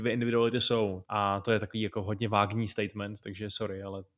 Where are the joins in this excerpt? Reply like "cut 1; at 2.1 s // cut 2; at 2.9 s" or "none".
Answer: cut 1; at 1.0 s